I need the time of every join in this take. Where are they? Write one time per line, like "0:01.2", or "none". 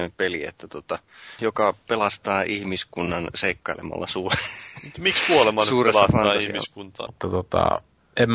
0:01.4
0:07.1